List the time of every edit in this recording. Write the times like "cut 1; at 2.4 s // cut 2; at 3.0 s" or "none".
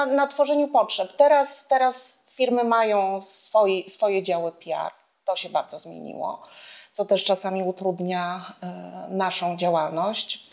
none